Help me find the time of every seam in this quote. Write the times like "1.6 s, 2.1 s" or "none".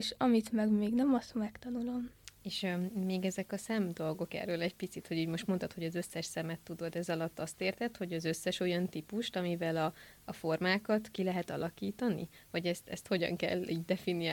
none